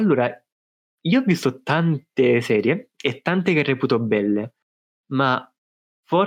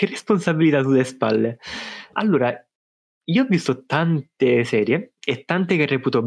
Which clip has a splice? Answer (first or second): second